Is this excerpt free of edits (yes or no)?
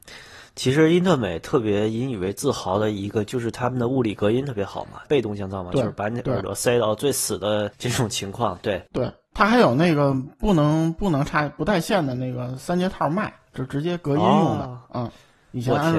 no